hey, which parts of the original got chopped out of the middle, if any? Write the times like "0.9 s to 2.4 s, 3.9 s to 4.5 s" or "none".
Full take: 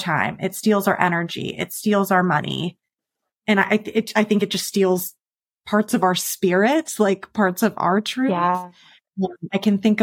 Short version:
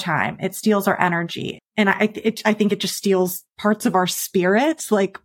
1.6 s to 3.3 s, 5.2 s to 5.6 s